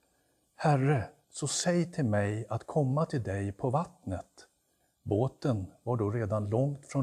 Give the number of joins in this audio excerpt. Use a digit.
2